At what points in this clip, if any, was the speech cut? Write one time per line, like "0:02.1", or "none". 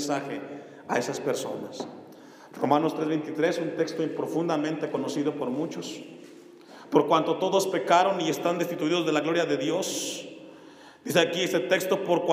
none